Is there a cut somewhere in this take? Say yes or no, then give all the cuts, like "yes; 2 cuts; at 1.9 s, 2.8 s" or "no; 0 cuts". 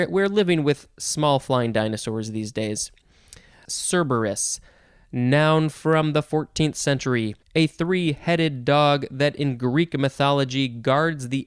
yes; 2 cuts; at 3.7 s, 7.4 s